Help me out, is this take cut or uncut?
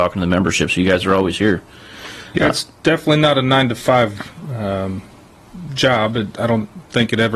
uncut